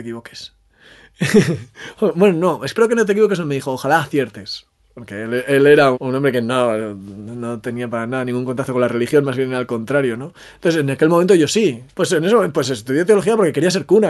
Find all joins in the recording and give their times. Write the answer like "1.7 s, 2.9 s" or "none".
5.9 s, 11.9 s